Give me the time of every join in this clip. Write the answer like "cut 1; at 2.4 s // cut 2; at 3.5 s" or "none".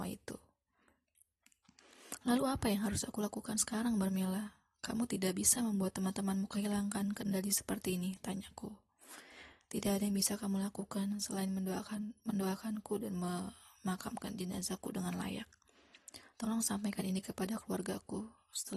none